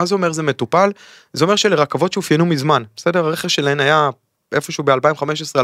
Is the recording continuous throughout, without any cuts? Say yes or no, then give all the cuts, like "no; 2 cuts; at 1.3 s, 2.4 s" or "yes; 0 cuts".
yes; 0 cuts